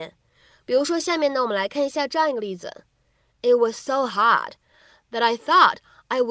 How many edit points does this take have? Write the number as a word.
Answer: zero